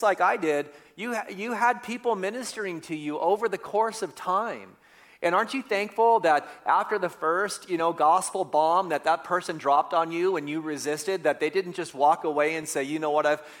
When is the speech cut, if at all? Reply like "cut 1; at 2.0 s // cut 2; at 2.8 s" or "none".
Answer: none

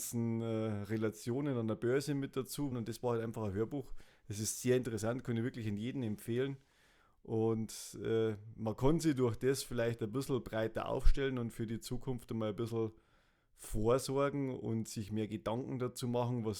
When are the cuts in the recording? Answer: cut 1; at 2.7 s

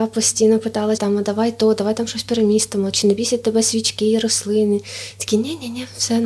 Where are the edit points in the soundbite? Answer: cut 1; at 1.0 s

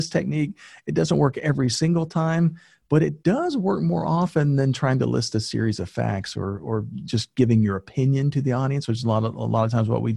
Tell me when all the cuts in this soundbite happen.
none

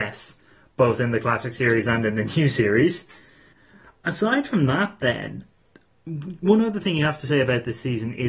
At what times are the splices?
none

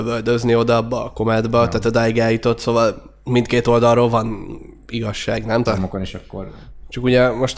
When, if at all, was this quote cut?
cut 1; at 5.7 s

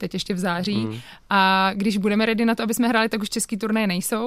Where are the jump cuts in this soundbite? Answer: none

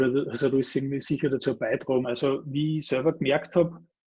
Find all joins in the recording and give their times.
cut 1; at 2.0 s

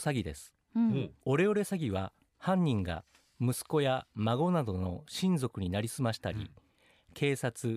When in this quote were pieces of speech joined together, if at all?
cut 1; at 1.2 s

